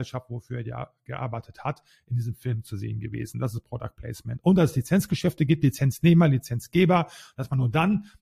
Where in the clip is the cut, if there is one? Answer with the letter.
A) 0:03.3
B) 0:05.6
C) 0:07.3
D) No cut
D